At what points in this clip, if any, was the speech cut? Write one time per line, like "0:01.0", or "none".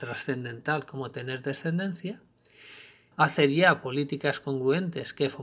0:03.1